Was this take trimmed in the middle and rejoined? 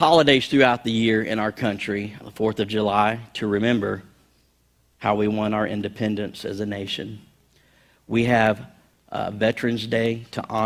yes; 1 cut; at 2.2 s

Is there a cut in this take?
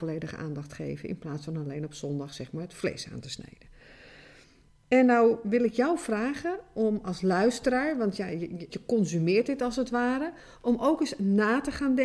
yes; 2 cuts; at 4.7 s, 8.7 s

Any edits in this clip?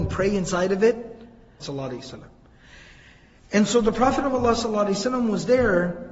yes; 1 cut; at 1.6 s

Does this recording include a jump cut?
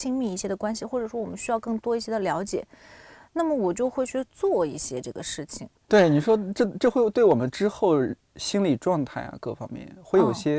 yes; 1 cut; at 5.9 s

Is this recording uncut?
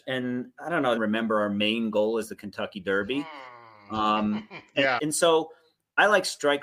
no; 2 cuts; at 1.0 s, 5.0 s

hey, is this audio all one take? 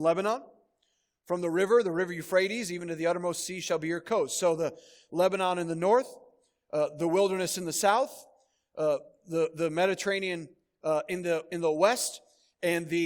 yes; 0 cuts

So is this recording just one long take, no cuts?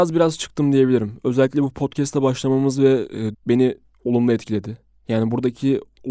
no; 1 cut; at 3.3 s

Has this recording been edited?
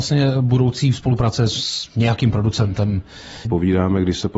yes; 1 cut; at 3.5 s

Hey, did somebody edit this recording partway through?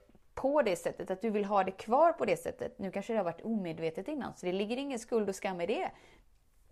no; 0 cuts

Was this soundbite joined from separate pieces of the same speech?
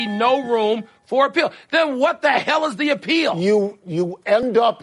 no; 0 cuts

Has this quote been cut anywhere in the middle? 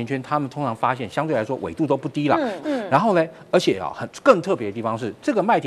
yes; 1 cut; at 2.6 s

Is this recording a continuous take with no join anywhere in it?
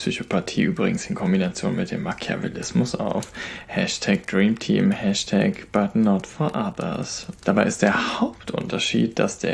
no; 1 cut; at 7.4 s

